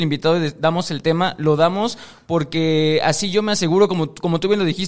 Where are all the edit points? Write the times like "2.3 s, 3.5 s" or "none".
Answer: none